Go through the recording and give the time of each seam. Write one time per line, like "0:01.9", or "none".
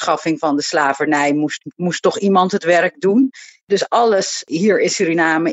none